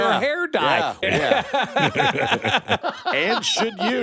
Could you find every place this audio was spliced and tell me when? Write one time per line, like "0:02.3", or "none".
0:01.0
0:02.8